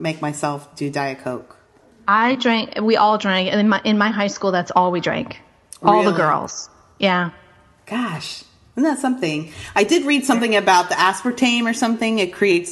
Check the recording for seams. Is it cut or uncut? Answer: uncut